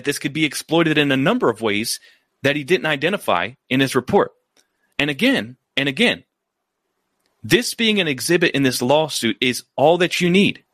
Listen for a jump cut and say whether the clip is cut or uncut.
uncut